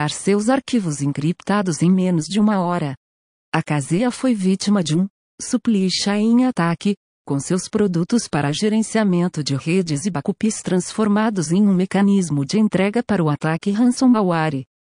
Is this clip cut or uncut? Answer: uncut